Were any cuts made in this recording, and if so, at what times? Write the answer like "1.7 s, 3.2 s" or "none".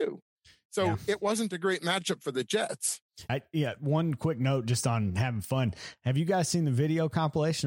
3.3 s